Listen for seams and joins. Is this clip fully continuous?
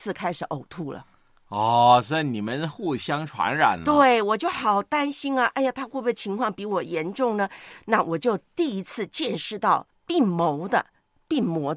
yes; 0 cuts

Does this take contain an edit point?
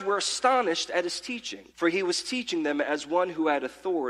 yes; 1 cut; at 1.7 s

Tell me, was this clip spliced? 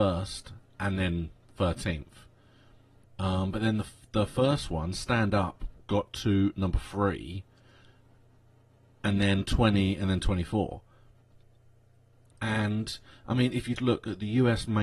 yes; 3 cuts; at 3.0 s, 12.3 s, 13.8 s

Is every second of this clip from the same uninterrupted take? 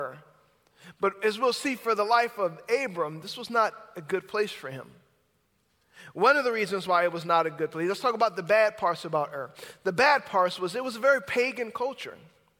yes; 0 cuts

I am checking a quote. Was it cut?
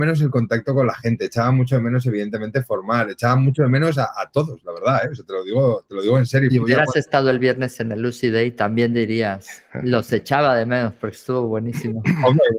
yes; 1 cut; at 6.5 s

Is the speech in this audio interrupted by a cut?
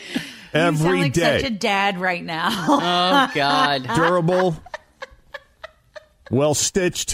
no; 0 cuts

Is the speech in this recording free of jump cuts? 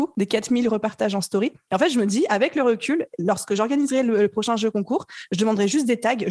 no; 1 cut; at 1.7 s

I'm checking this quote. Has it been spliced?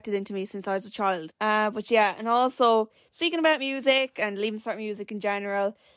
yes; 1 cut; at 1.3 s

